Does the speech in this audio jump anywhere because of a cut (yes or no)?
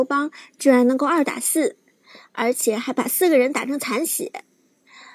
no